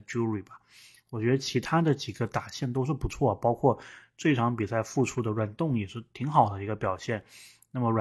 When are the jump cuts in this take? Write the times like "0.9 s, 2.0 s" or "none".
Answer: none